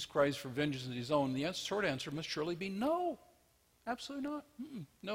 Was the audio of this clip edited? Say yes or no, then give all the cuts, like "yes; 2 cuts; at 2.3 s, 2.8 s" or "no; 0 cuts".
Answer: no; 0 cuts